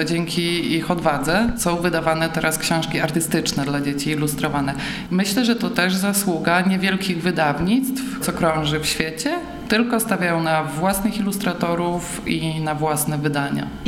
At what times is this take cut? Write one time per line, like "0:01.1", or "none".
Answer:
0:05.1
0:08.2